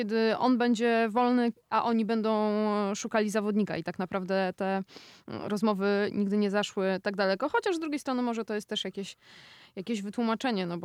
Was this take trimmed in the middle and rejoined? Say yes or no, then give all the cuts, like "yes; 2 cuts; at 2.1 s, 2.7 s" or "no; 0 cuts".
no; 0 cuts